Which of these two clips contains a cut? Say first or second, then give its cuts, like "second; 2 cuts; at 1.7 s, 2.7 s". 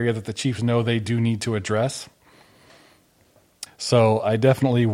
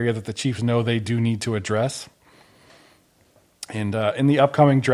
first; 1 cut; at 3.7 s